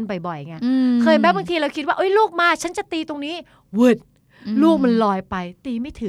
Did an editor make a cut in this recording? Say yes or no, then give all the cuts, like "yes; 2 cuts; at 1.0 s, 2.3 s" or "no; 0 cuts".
no; 0 cuts